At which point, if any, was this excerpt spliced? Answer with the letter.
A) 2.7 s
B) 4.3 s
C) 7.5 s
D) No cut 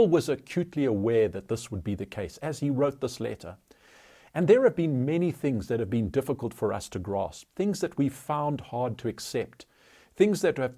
B